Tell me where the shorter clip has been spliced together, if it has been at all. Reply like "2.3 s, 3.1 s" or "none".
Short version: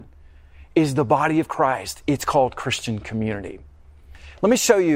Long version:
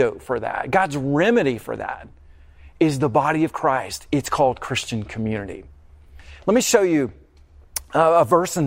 none